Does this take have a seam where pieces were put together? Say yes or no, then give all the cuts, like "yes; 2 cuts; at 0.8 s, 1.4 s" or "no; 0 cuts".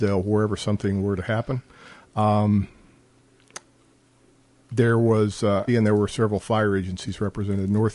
yes; 1 cut; at 5.7 s